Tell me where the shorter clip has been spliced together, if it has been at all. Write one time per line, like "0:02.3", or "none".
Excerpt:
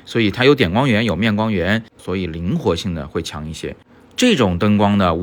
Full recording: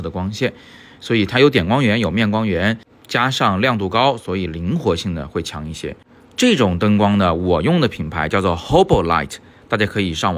0:02.0

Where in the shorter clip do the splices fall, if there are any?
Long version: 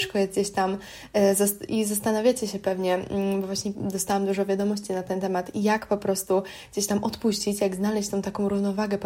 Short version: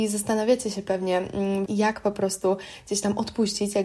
0:01.7

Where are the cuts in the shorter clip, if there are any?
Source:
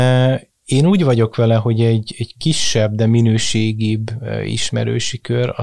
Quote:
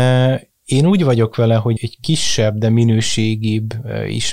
0:01.8

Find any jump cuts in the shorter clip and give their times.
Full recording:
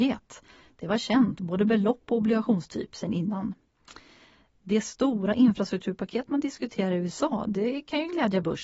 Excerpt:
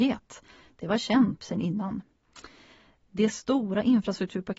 0:01.4

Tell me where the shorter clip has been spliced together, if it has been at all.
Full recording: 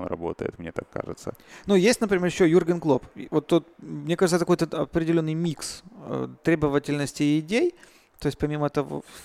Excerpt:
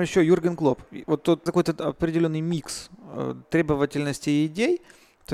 0:01.5

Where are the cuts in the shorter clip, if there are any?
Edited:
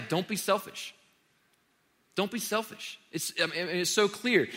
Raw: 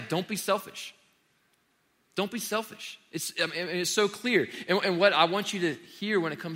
none

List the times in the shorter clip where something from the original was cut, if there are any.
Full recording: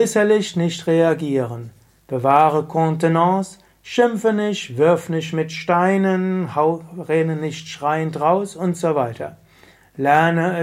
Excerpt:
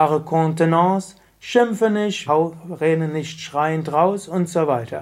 0:02.3

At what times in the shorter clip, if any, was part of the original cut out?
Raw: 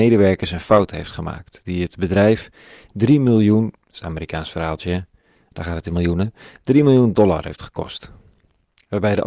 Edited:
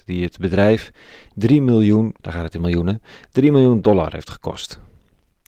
0:02.2

